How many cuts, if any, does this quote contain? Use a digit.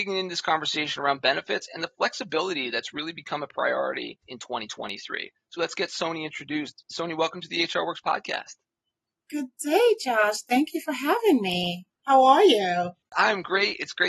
1